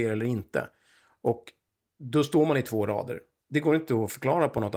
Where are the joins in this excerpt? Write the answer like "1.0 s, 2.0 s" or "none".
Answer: 1.9 s, 3.4 s